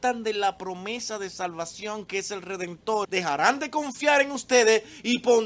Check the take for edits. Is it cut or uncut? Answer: cut